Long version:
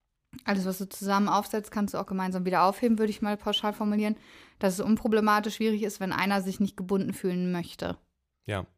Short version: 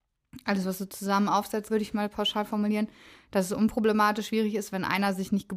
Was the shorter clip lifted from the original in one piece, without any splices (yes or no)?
no